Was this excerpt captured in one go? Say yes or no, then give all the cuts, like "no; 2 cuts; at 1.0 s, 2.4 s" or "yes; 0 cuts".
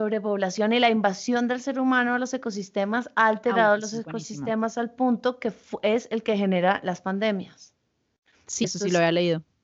no; 1 cut; at 8.6 s